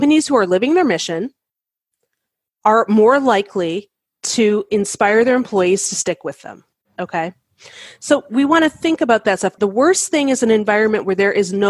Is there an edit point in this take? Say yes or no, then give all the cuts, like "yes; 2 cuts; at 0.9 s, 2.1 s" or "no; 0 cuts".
yes; 1 cut; at 9.6 s